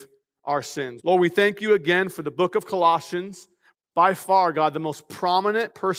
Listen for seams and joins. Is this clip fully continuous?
no; 2 cuts; at 1.0 s, 3.7 s

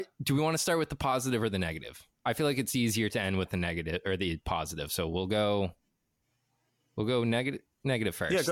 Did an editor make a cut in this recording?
no; 0 cuts

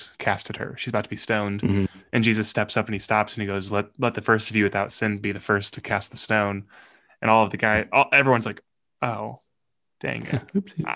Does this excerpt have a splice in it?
no; 0 cuts

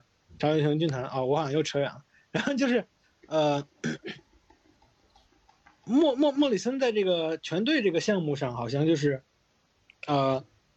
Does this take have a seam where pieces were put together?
no; 0 cuts

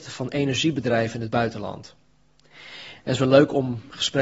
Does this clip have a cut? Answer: yes; 1 cut; at 3.0 s

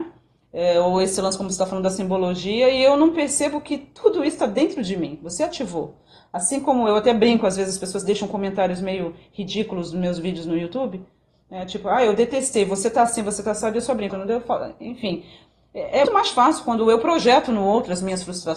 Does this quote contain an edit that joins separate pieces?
yes; 2 cuts; at 14.1 s, 16.0 s

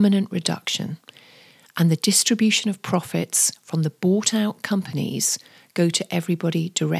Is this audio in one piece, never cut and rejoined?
yes; 0 cuts

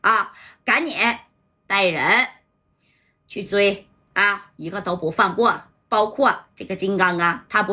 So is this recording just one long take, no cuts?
yes; 0 cuts

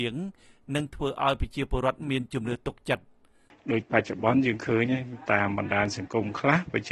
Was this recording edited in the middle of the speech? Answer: no; 0 cuts

